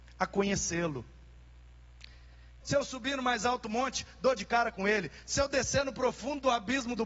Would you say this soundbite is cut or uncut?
cut